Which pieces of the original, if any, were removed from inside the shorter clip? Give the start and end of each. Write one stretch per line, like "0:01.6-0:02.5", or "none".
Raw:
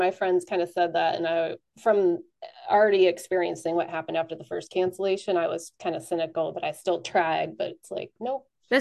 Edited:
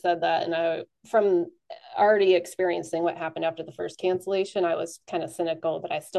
none